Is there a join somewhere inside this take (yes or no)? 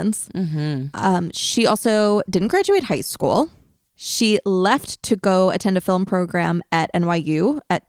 no